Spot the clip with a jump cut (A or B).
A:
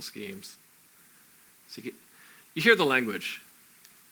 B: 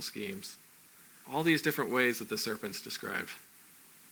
B